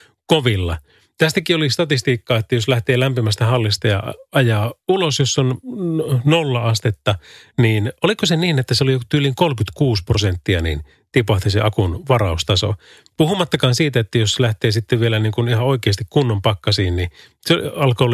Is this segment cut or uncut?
uncut